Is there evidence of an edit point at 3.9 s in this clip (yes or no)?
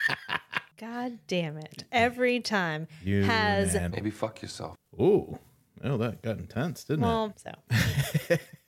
yes